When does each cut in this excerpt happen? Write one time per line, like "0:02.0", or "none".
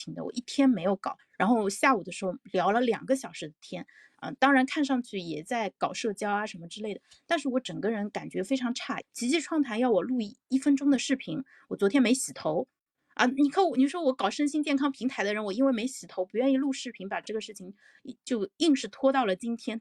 0:09.0